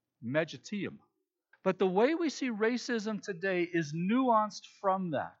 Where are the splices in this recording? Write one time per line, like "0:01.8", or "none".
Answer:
0:01.5